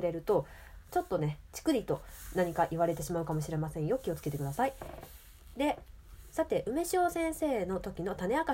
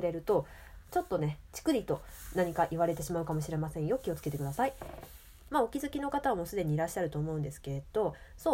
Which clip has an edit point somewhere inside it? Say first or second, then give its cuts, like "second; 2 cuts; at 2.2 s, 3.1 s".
second; 1 cut; at 5.5 s